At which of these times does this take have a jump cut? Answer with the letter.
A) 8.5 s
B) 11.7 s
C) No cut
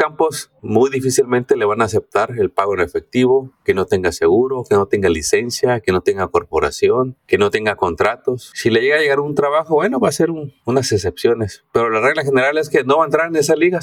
C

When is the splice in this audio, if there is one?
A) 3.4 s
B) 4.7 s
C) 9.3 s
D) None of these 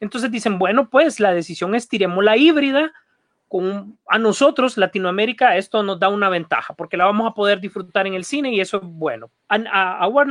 C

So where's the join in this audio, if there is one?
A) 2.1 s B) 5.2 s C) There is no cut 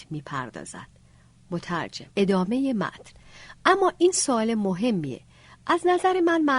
A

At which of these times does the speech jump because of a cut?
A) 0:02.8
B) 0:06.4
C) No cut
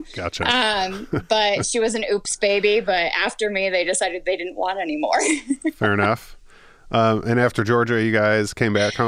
C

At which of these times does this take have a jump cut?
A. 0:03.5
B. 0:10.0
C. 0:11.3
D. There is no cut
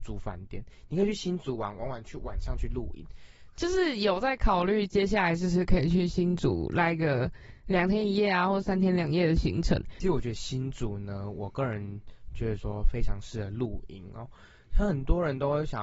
A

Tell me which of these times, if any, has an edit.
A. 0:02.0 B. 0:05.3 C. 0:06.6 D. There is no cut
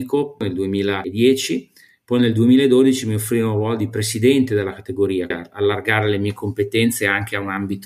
B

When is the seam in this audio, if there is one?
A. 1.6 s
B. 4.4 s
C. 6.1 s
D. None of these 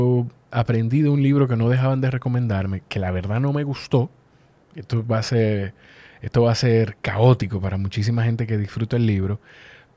D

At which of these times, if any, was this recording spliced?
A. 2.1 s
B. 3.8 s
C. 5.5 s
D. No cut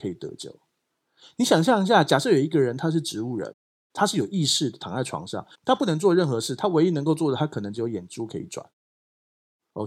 C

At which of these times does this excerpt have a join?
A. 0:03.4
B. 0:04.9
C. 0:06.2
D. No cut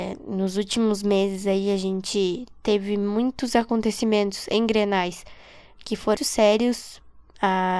C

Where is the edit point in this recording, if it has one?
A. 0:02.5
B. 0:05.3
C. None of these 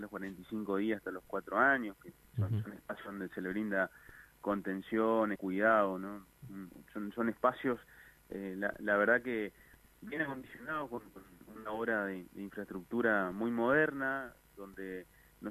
B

